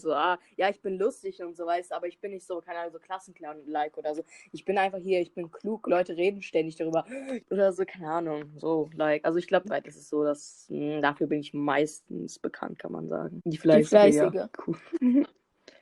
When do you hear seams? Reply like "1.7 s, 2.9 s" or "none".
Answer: 7.4 s, 9.6 s